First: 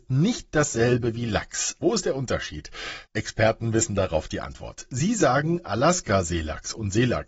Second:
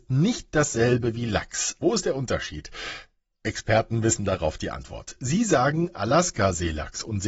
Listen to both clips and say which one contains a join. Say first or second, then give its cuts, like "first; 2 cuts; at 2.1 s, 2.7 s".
first; 1 cut; at 3.1 s